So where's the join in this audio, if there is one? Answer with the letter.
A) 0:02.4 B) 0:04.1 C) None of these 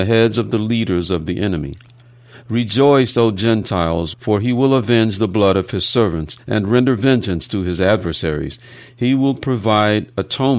B